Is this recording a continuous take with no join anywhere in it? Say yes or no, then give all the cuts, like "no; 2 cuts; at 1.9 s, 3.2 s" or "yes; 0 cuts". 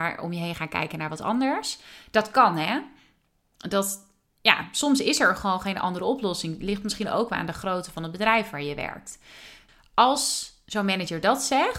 yes; 0 cuts